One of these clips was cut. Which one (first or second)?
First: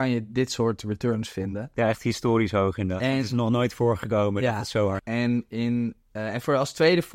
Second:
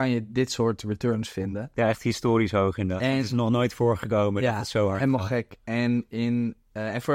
first